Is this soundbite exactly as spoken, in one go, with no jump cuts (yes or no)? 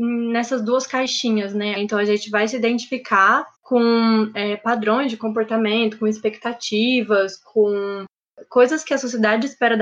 no